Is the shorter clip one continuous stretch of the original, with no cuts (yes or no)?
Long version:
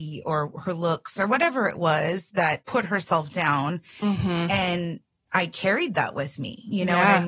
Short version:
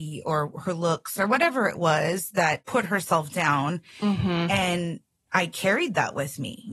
yes